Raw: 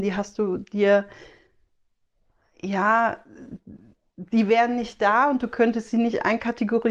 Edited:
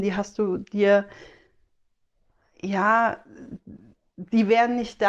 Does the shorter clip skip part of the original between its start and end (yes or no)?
no